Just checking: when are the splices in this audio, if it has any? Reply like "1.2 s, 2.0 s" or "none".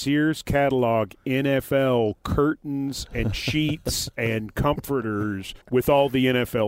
5.6 s